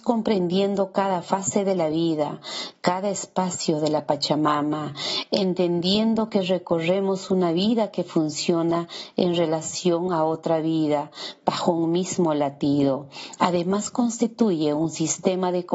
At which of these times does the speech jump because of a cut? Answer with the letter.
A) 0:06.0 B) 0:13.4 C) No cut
B